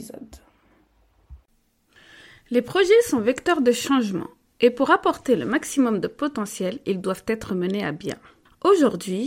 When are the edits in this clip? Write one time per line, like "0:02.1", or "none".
none